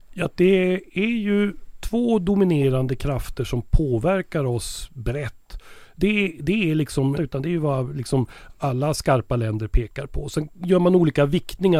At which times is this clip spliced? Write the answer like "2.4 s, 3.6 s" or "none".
6.0 s, 7.1 s